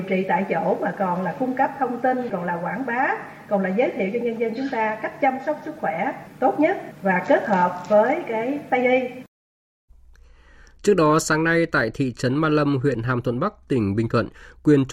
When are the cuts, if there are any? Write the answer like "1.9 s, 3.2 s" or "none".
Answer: 2.3 s

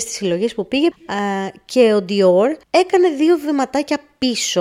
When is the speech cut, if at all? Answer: 0.9 s, 2.6 s

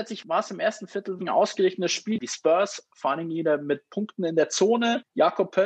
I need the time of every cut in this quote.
1.2 s

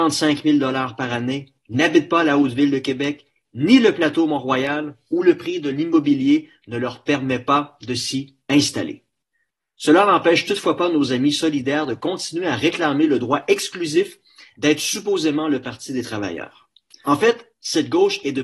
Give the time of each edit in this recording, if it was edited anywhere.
17.0 s

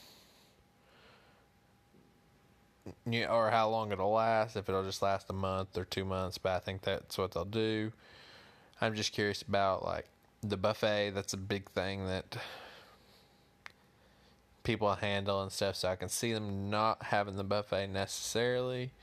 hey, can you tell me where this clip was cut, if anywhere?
none

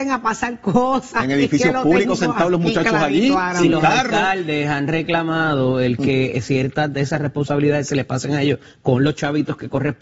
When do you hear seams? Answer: none

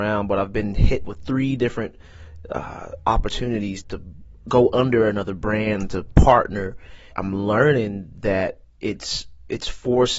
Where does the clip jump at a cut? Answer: 3.8 s, 7.1 s

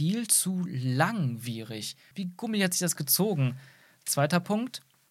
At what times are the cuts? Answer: 2.1 s

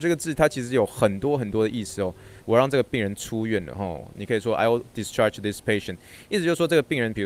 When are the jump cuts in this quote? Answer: 2.4 s, 4.2 s

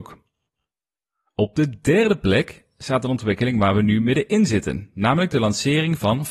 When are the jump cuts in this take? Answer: none

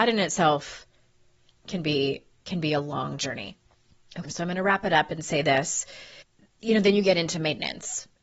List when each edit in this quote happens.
4.3 s

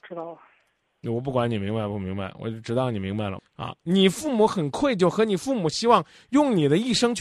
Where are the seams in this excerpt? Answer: 3.4 s

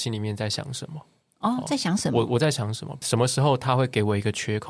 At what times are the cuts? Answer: 3.0 s

